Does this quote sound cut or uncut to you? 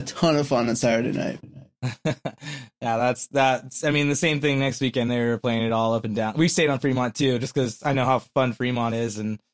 uncut